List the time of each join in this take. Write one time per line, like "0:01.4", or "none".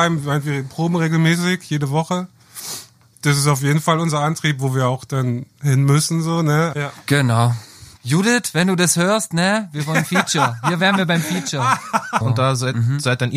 0:06.7
0:08.0
0:12.2